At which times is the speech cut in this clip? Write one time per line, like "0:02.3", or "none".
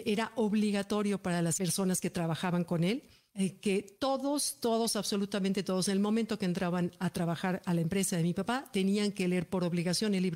none